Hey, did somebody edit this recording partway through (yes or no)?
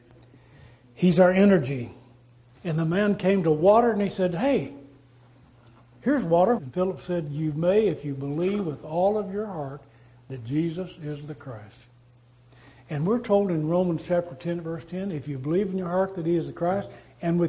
yes